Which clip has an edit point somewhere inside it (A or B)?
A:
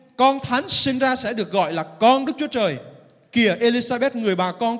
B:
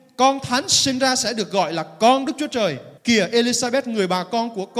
B